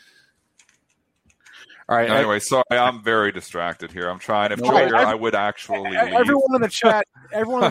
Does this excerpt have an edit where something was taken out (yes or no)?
yes